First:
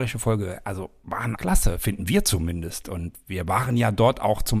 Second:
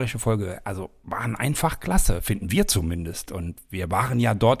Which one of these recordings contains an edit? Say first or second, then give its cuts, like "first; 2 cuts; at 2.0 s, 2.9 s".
first; 1 cut; at 1.4 s